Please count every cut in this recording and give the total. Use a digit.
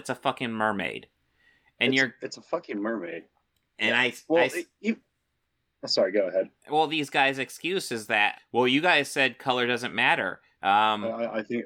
2